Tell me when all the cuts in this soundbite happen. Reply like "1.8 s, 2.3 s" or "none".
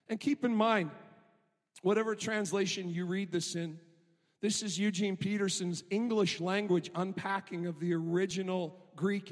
none